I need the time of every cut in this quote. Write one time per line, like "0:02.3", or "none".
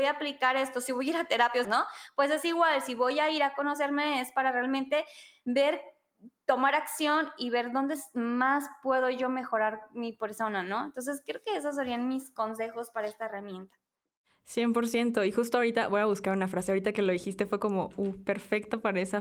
0:01.6